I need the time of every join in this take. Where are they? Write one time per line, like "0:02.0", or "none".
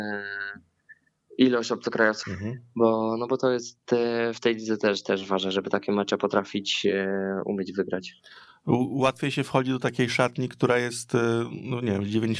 0:02.2